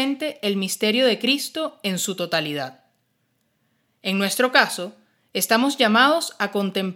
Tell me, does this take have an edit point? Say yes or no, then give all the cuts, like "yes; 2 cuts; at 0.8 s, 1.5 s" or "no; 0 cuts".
no; 0 cuts